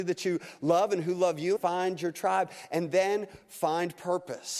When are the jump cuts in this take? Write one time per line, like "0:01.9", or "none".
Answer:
0:01.6